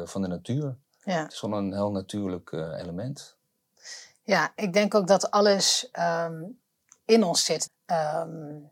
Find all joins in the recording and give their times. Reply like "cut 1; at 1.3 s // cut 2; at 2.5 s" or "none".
cut 1; at 7.7 s